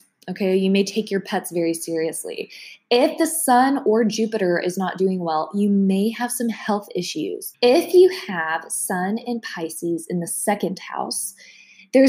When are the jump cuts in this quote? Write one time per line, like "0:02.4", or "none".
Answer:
0:07.5